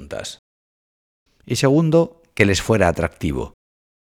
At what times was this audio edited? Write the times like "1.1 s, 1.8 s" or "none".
1.3 s